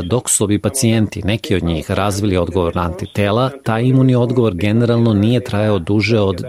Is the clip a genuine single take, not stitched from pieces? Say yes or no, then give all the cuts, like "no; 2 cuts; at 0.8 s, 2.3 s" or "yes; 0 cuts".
yes; 0 cuts